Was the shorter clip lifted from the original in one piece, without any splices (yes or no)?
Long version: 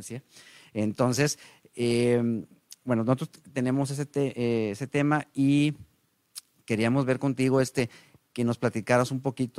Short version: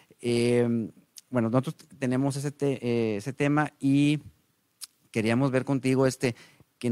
yes